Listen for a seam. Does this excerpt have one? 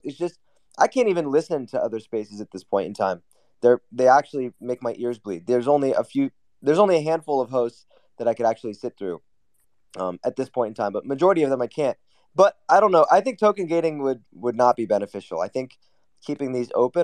yes; 1 cut; at 14.3 s

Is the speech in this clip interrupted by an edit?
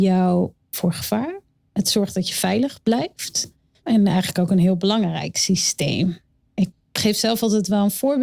yes; 2 cuts; at 3.8 s, 6.7 s

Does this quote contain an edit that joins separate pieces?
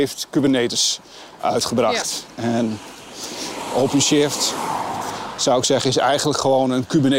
no; 0 cuts

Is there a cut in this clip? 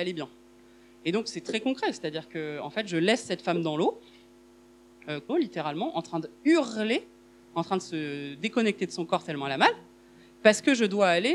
yes; 1 cut; at 5.3 s

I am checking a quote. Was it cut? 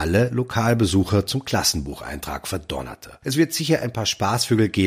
yes; 1 cut; at 3.2 s

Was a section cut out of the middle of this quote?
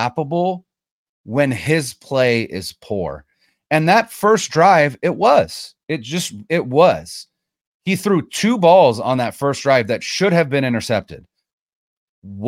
no; 0 cuts

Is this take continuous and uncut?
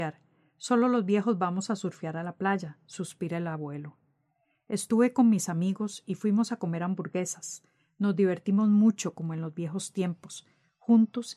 yes; 0 cuts

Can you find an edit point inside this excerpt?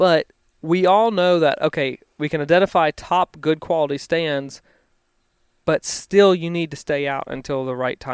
no; 0 cuts

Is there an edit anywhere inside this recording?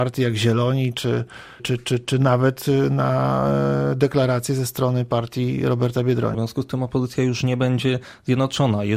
yes; 2 cuts; at 1.6 s, 6.3 s

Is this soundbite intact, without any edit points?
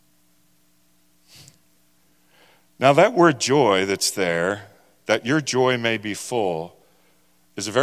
yes; 0 cuts

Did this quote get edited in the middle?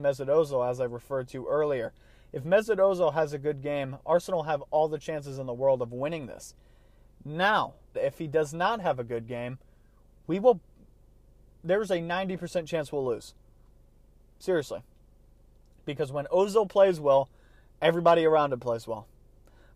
yes; 1 cut; at 7.9 s

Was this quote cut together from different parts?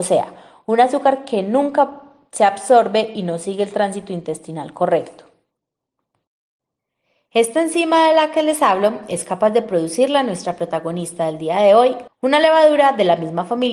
yes; 1 cut; at 12.1 s

